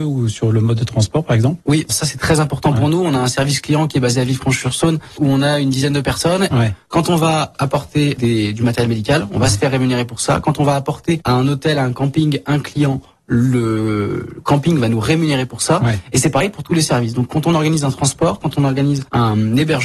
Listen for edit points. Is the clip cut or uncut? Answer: cut